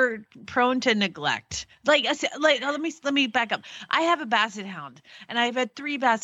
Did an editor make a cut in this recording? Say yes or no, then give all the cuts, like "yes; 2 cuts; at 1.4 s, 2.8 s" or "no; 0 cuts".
no; 0 cuts